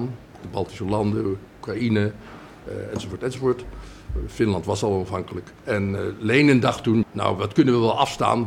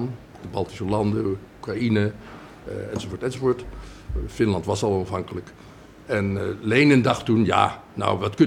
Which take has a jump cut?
first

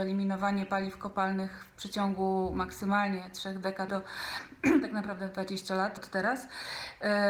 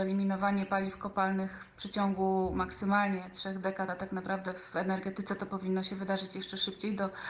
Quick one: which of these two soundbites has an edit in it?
first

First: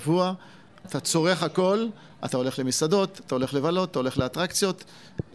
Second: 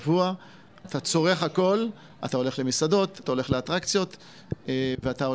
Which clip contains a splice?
second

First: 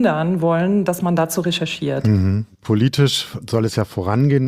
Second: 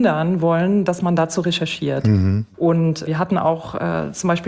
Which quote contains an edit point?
second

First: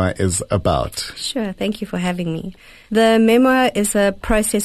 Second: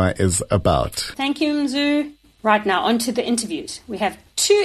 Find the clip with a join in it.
second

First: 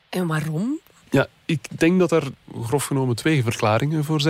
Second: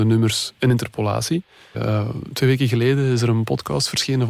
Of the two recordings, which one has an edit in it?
second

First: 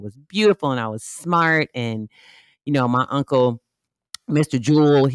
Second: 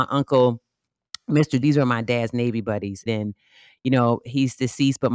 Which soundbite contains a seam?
second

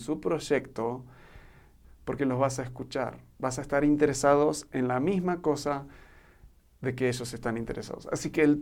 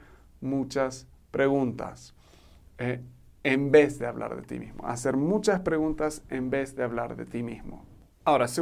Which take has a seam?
first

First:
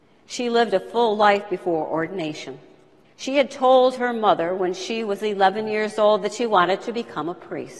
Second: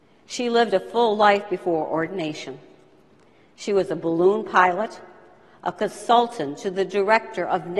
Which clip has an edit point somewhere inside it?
first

